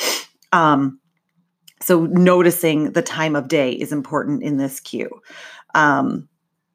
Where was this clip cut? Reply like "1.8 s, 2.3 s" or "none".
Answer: none